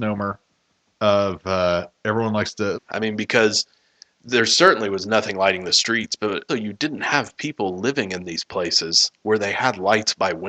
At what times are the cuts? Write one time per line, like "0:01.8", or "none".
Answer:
0:02.7
0:06.5